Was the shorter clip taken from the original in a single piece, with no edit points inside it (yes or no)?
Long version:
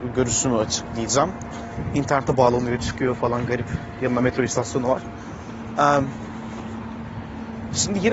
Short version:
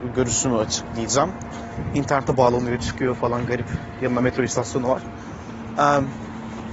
yes